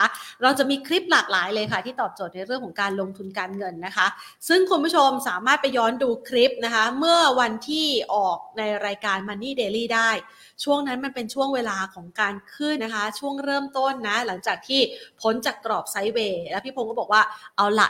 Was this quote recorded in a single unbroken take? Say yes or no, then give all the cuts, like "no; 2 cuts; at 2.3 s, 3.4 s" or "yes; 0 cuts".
no; 1 cut; at 12.8 s